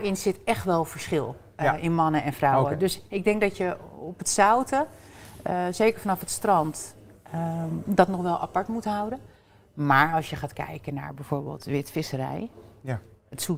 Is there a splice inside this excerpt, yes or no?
no